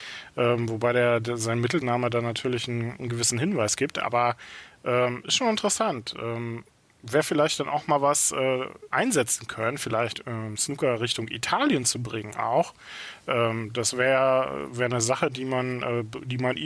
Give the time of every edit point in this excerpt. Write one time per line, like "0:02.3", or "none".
0:08.9